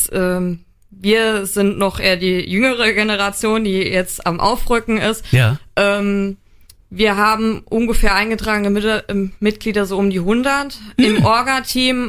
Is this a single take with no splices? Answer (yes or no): yes